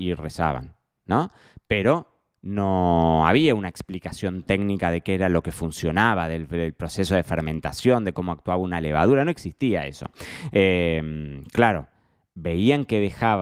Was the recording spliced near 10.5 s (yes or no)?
yes